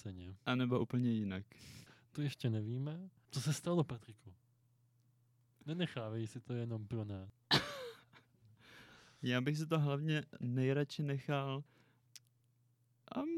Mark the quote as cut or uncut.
uncut